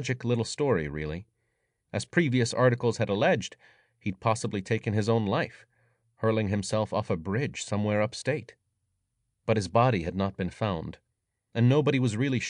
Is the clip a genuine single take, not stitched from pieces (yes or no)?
yes